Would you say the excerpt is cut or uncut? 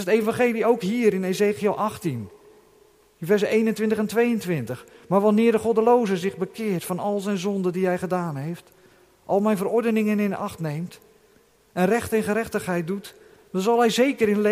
uncut